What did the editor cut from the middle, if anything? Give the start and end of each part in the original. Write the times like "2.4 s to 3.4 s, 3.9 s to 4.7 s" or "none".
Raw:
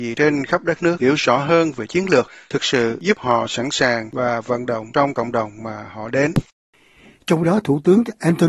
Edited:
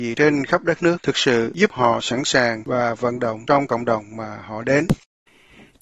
1.0 s to 2.4 s